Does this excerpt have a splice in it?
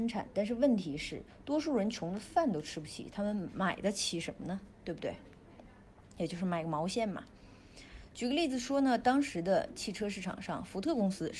no; 0 cuts

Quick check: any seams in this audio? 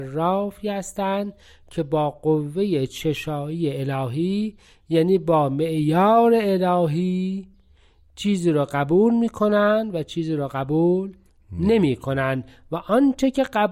no; 0 cuts

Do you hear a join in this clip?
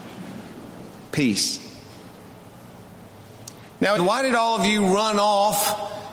yes; 2 cuts; at 1.1 s, 4.0 s

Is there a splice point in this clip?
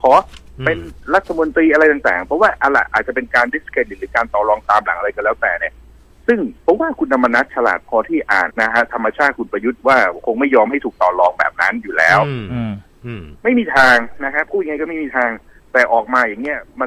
yes; 2 cuts; at 6.6 s, 8.5 s

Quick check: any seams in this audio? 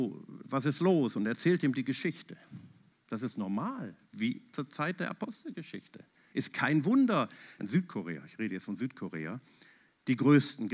yes; 3 cuts; at 2.9 s, 6.3 s, 7.6 s

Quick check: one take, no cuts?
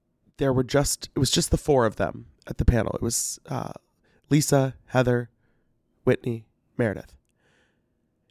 yes; 0 cuts

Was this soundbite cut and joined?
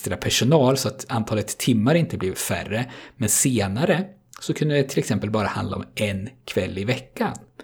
no; 0 cuts

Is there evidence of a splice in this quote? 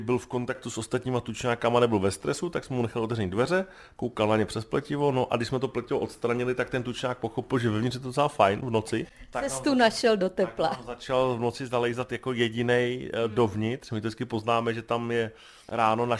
no; 0 cuts

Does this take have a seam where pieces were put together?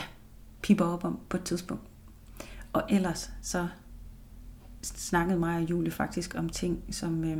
no; 0 cuts

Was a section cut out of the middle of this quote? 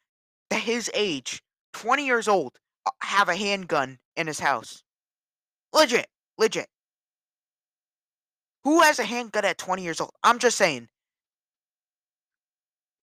no; 0 cuts

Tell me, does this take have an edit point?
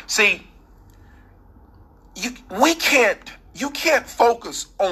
no; 0 cuts

